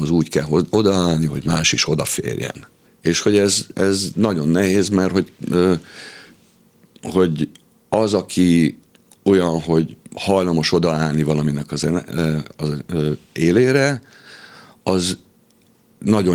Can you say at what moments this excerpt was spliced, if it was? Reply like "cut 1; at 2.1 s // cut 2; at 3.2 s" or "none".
cut 1; at 2.9 s